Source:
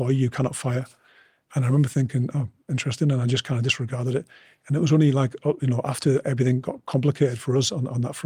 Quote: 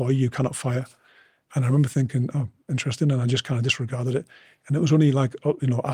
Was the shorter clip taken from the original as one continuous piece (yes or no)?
yes